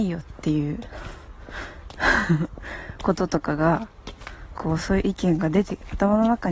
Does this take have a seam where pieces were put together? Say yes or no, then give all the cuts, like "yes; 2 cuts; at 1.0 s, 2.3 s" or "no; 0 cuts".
no; 0 cuts